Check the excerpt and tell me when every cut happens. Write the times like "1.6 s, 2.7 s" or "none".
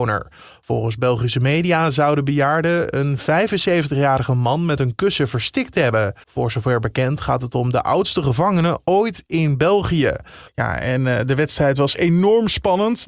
6.2 s, 10.5 s